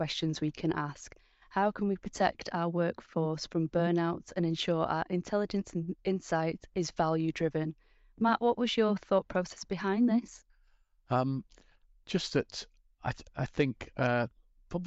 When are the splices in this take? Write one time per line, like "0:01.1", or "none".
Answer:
none